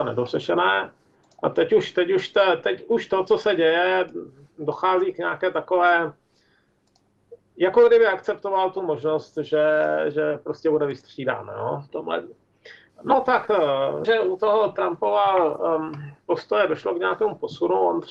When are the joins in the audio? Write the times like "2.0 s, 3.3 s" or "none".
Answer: 12.9 s, 14.0 s